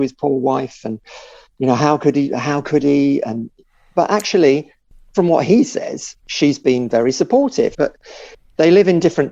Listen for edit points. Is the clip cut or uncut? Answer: cut